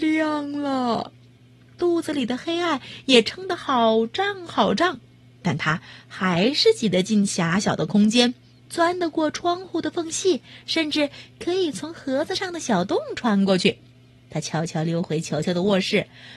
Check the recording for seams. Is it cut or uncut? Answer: cut